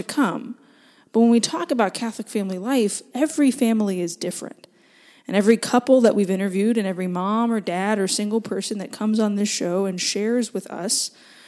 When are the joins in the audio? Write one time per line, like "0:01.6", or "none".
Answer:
0:03.1